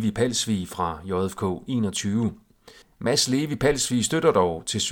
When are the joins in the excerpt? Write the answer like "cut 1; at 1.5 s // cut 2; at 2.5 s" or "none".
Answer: cut 1; at 2.8 s